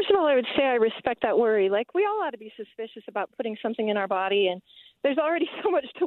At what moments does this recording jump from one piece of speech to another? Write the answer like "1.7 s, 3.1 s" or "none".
none

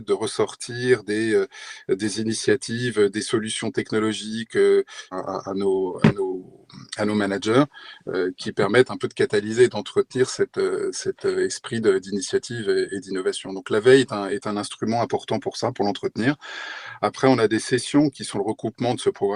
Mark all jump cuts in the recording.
5.1 s

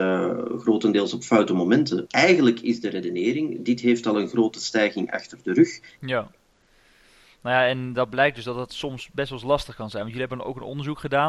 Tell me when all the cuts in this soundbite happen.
2.1 s, 6.0 s

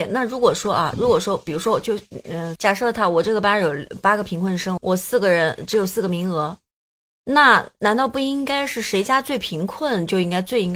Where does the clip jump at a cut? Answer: 2.6 s, 4.8 s

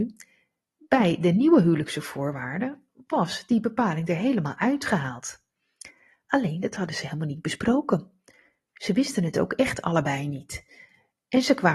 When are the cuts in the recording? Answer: none

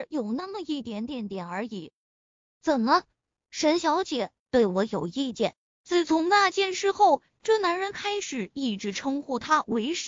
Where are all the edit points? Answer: 2.4 s

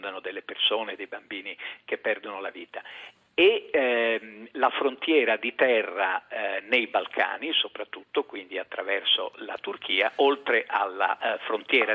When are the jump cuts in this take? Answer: none

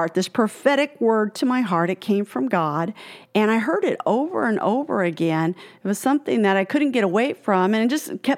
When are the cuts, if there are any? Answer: none

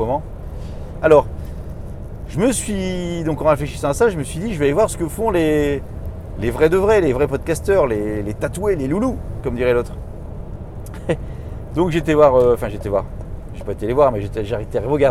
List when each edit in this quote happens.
1.0 s

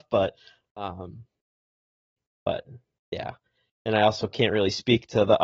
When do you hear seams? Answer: none

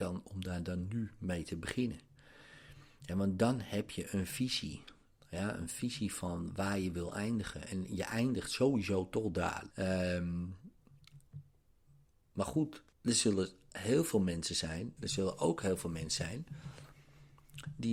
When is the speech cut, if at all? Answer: 9.7 s, 12.9 s, 15.0 s

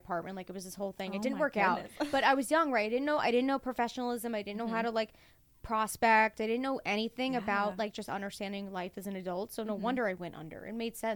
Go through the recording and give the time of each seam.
none

